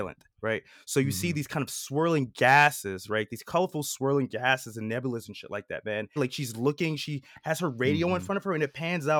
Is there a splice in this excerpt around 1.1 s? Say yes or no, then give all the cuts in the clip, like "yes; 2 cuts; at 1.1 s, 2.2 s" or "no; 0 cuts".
no; 1 cut; at 6.2 s